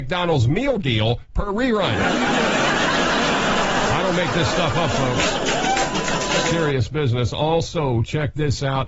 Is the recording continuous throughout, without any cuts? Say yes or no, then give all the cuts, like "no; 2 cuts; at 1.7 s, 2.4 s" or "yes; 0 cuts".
yes; 0 cuts